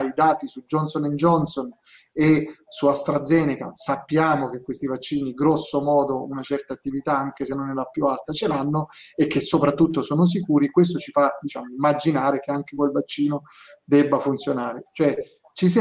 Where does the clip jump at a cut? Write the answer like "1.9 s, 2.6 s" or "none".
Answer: 14.9 s